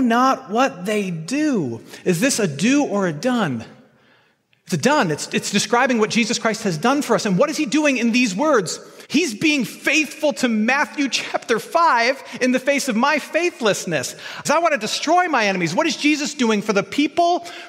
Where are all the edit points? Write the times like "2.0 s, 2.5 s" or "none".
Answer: 9.0 s, 14.4 s